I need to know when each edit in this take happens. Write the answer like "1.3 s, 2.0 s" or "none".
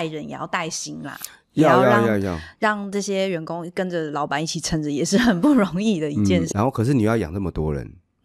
6.5 s